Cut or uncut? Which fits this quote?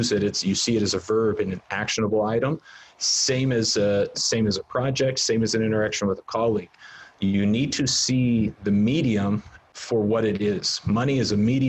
cut